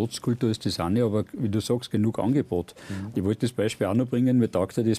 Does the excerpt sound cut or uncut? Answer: uncut